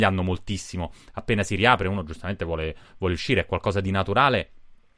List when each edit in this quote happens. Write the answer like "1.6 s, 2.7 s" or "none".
none